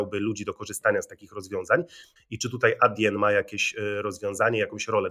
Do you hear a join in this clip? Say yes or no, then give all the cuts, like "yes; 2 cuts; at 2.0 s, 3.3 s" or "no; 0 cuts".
yes; 1 cut; at 2.2 s